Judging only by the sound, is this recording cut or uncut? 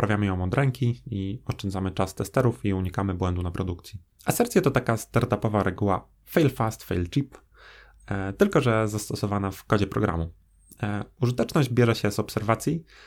cut